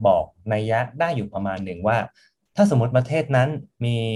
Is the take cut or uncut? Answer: uncut